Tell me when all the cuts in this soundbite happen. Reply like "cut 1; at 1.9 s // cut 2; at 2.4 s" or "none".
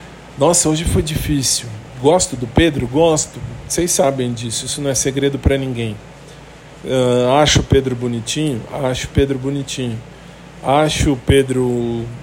none